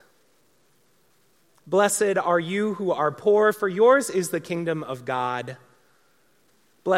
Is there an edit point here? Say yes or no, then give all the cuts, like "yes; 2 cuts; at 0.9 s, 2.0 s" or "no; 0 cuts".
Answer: no; 0 cuts